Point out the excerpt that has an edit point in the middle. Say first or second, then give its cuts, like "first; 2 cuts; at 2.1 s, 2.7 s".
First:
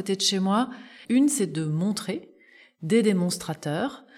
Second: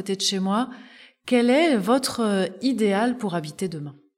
first; 1 cut; at 1.0 s